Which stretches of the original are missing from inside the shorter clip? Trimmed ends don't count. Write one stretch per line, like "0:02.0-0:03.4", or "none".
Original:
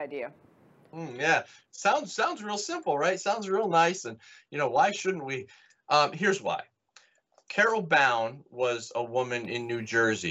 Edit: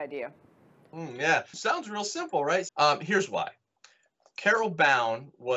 0:01.5-0:02.1
0:03.2-0:05.8